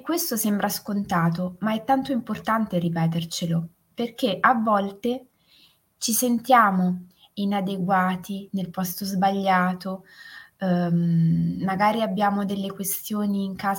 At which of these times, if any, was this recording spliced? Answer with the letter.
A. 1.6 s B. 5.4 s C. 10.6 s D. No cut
D